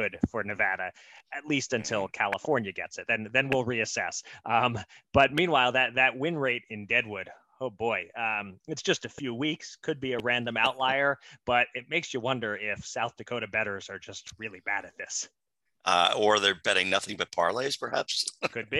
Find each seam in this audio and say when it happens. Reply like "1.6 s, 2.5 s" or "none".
none